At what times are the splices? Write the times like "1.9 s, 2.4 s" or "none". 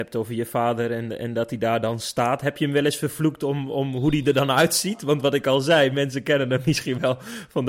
none